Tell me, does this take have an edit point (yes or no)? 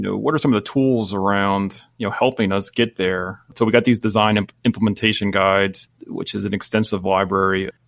no